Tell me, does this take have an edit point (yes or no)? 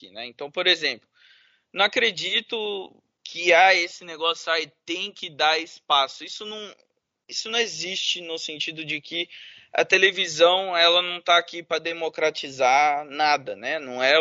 no